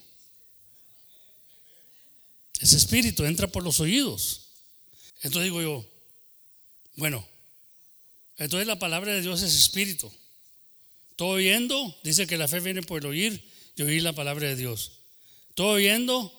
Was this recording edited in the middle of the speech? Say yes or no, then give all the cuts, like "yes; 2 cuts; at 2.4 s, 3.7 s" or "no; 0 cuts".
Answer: yes; 1 cut; at 5.1 s